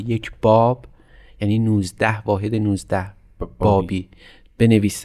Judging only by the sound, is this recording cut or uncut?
uncut